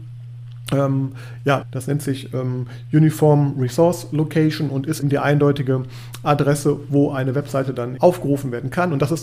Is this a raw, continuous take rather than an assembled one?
no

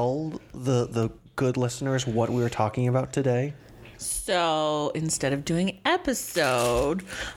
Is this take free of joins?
yes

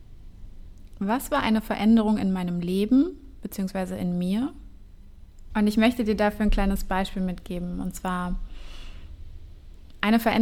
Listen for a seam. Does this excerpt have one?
yes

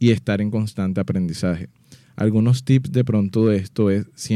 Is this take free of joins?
yes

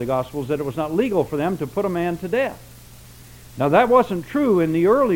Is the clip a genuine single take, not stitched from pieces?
yes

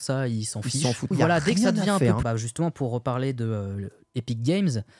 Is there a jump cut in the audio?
yes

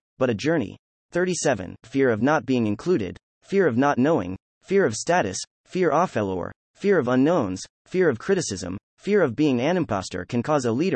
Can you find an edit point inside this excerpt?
yes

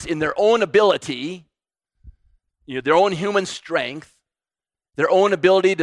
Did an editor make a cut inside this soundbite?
no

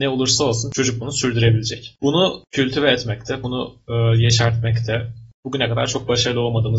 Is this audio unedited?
yes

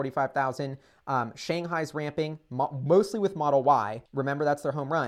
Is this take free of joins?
no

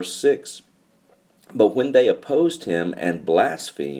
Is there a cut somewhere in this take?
no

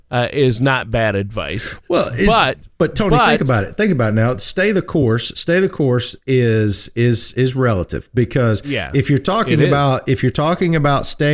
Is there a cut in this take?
no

